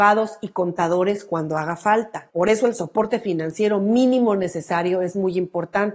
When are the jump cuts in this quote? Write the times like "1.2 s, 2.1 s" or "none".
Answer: 2.3 s